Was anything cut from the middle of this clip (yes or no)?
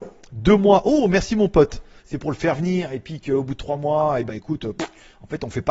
yes